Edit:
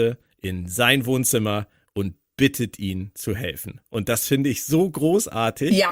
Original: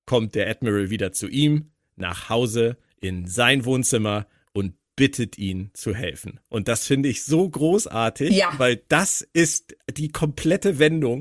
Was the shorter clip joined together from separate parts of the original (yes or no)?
no